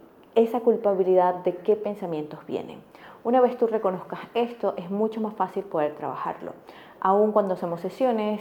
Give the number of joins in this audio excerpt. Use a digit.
0